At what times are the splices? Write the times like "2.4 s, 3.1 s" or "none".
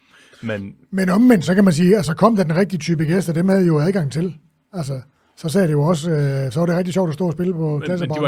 none

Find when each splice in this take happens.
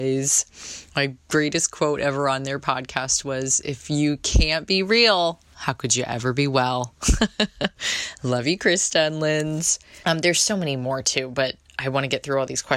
10.0 s

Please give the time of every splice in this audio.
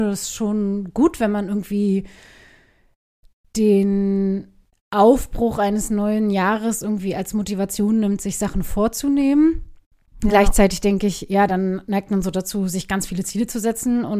none

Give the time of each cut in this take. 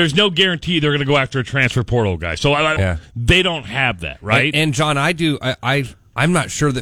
2.8 s

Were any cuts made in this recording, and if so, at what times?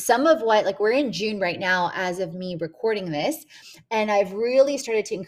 none

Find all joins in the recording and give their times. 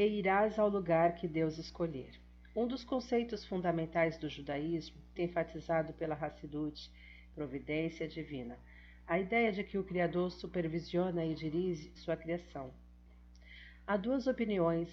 5.2 s, 7.3 s, 12.0 s

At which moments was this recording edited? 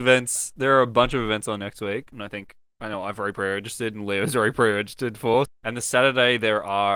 2.1 s, 5.5 s

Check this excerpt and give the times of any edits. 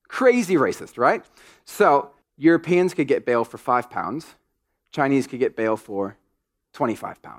2.2 s

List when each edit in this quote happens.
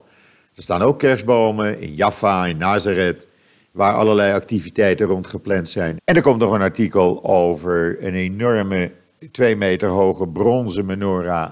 6.0 s

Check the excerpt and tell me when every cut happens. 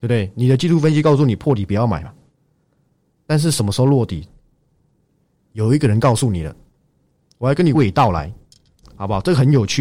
7.7 s

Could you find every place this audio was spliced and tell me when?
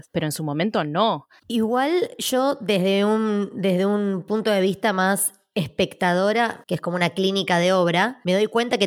1.4 s, 6.6 s

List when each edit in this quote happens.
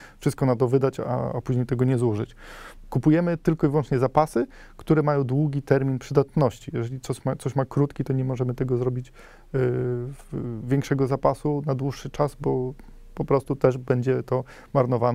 none

